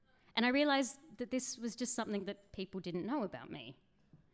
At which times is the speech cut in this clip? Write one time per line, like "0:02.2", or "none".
none